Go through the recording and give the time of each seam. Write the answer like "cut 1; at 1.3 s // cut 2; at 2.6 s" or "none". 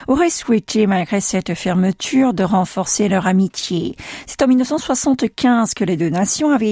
none